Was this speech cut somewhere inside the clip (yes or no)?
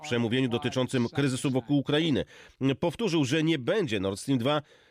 no